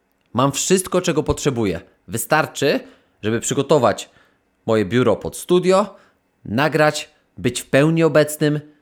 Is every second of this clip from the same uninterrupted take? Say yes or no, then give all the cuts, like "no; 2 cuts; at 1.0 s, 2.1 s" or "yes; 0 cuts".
yes; 0 cuts